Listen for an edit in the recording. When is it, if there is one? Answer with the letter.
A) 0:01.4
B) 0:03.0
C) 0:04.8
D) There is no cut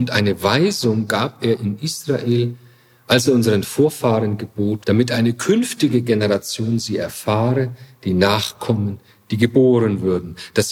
C